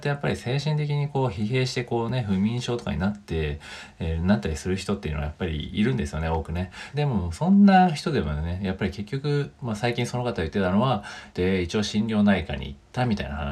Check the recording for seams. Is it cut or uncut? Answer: cut